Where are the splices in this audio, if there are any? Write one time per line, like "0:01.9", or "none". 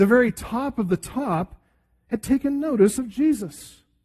none